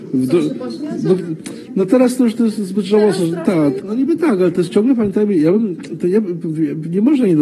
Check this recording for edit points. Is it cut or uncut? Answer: cut